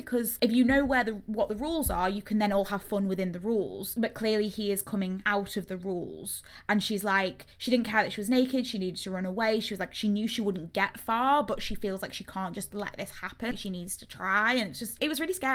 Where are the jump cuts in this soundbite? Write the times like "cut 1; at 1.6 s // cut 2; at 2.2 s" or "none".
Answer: none